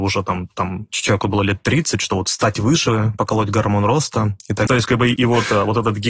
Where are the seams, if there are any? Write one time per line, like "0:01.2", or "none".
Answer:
0:04.7